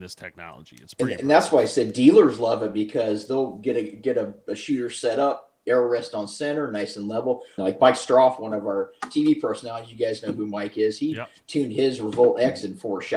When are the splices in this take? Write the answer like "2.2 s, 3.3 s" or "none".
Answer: 7.6 s